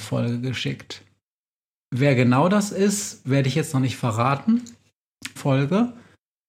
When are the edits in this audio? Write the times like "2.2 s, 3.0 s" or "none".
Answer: 1.8 s, 5.4 s